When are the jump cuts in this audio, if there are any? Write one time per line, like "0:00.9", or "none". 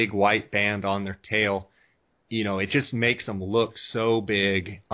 none

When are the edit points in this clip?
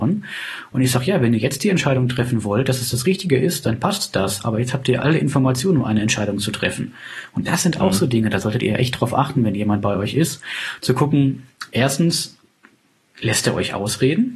none

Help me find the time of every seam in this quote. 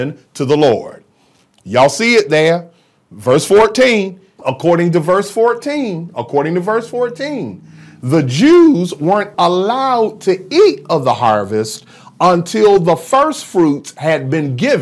0:04.4
0:09.3

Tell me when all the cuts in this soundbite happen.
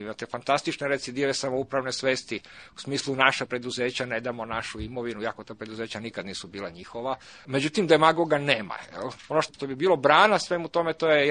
0:07.4
0:09.2

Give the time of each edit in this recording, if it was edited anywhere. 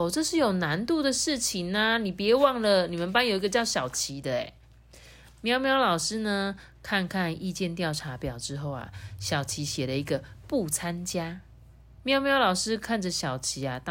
none

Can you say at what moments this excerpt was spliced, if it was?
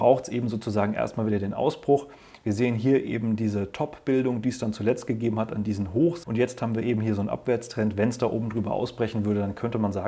0:06.2

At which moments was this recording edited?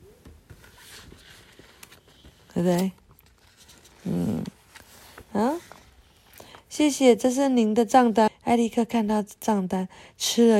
0:08.3

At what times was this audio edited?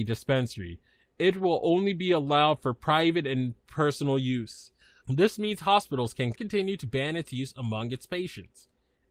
0:05.0
0:06.4

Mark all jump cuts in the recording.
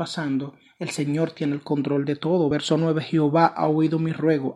none

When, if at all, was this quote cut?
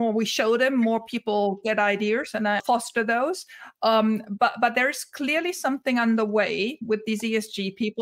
0:02.6

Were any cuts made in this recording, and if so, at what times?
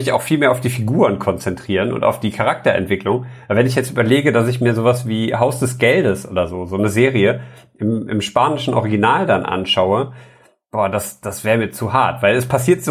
none

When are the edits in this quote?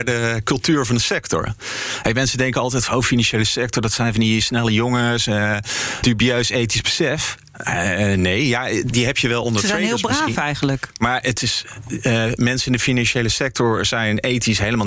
none

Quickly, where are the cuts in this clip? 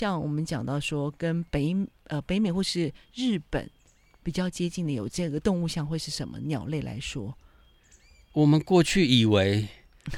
none

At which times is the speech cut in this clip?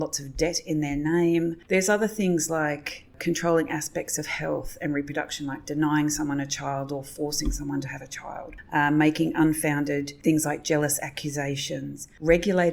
0:01.7

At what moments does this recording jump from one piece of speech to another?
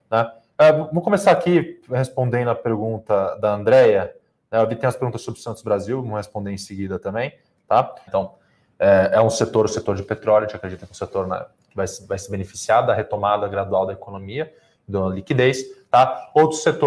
0:08.1

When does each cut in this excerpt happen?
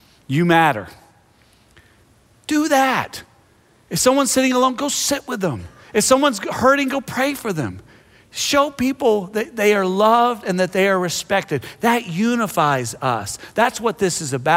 none

